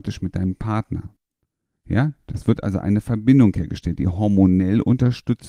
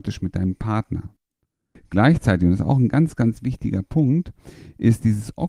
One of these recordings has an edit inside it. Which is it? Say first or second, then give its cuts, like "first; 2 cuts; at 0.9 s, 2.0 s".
second; 1 cut; at 1.8 s